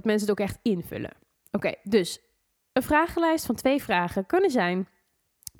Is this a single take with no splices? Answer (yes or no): yes